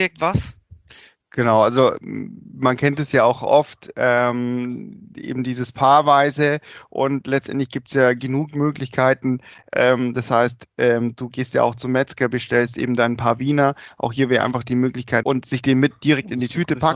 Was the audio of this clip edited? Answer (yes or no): yes